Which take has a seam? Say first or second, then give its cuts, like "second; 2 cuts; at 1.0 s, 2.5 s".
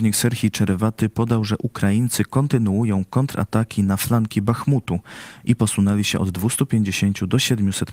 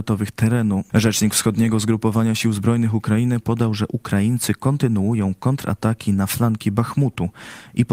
second; 2 cuts; at 0.9 s, 3.4 s